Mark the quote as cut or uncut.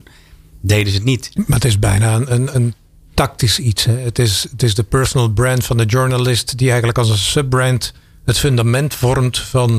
cut